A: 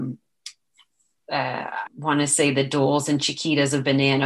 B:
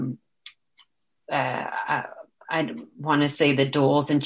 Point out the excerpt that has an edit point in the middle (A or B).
A